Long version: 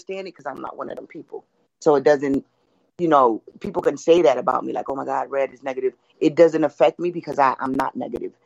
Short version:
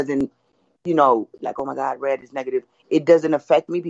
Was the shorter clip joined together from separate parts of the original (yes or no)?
yes